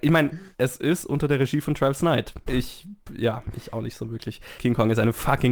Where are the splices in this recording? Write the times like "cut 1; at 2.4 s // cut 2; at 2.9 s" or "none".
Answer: cut 1; at 2.5 s // cut 2; at 4.6 s